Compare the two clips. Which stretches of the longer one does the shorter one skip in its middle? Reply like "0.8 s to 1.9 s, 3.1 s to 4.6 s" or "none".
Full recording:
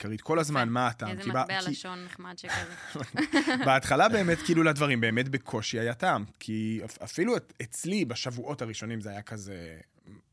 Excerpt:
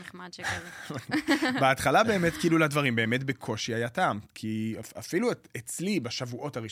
none